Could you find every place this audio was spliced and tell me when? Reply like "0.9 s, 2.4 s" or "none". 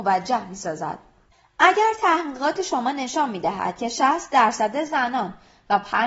none